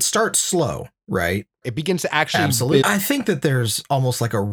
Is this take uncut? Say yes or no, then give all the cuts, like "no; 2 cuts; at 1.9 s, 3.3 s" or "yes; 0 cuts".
no; 2 cuts; at 1.6 s, 2.8 s